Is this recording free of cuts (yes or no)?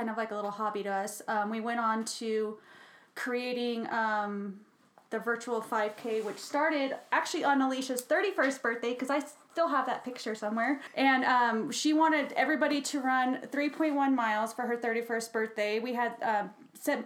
yes